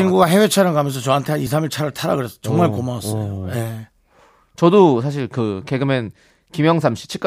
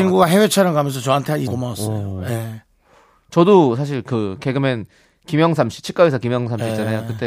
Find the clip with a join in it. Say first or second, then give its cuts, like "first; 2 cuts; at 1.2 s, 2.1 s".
second; 1 cut; at 1.5 s